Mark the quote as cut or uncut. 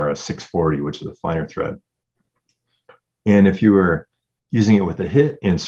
uncut